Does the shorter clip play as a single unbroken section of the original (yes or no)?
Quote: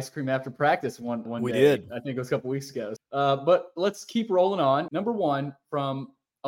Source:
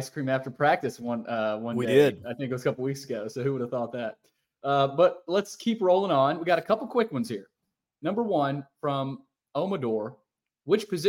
no